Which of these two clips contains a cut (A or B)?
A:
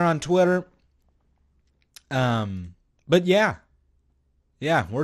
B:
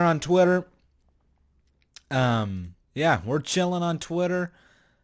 B